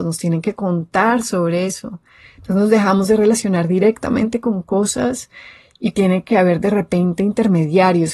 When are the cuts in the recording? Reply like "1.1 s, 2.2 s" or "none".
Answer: none